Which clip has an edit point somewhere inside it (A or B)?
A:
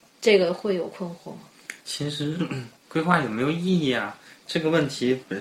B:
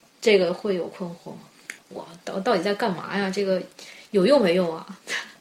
B